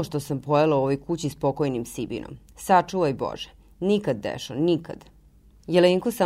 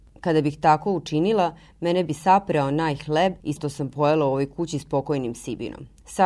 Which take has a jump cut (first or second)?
second